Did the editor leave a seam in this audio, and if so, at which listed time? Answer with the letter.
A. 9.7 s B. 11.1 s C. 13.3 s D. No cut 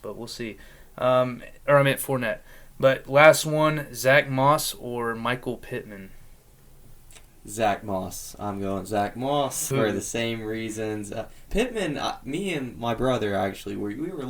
A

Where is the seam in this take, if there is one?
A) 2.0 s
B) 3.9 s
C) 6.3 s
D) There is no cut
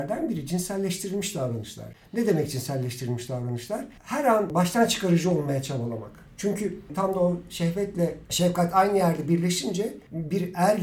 D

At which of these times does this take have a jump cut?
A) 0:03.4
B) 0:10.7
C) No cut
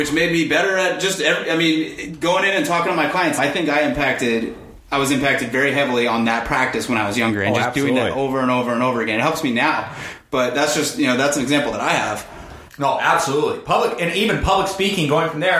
A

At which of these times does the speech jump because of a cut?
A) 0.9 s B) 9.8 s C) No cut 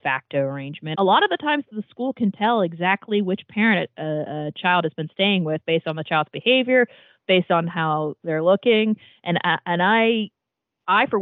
A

